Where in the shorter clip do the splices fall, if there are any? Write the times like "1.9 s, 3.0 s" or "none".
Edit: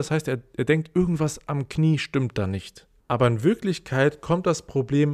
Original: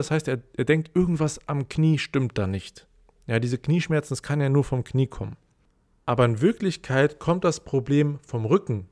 3.0 s